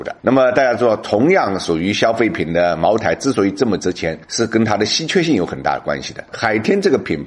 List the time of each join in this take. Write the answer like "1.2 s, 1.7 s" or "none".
6.3 s